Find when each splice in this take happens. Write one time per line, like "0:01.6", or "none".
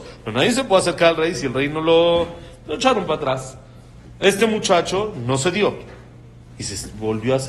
none